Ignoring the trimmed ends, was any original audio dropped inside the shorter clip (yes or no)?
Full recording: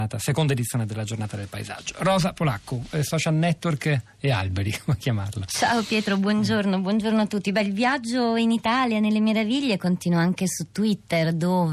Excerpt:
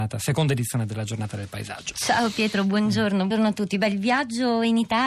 yes